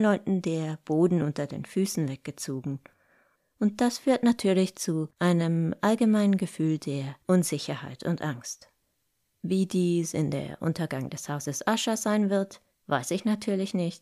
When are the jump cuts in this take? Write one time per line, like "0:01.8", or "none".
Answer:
none